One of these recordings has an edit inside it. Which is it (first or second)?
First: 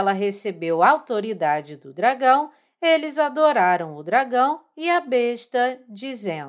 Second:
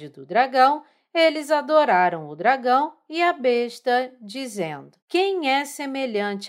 second